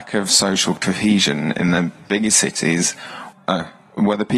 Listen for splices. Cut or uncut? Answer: cut